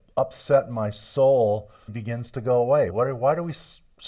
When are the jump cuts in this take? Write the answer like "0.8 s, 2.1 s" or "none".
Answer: 1.9 s, 2.9 s